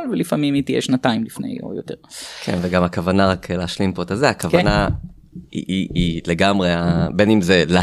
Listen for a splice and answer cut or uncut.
uncut